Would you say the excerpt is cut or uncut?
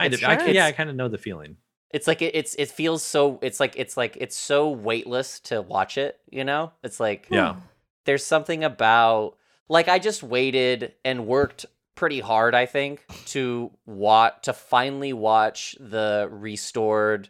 uncut